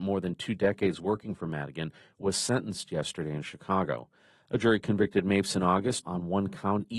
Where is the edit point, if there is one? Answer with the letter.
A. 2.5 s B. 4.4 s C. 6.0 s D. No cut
C